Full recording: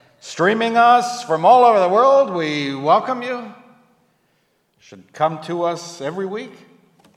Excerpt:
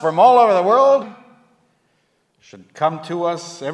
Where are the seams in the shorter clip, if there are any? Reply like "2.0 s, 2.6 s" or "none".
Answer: 1.0 s